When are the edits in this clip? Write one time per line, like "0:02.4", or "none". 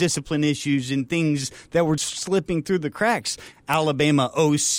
0:02.0
0:03.5